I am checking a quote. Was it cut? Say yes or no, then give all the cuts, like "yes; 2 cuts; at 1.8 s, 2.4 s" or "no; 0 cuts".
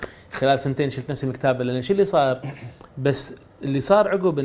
yes; 1 cut; at 2.9 s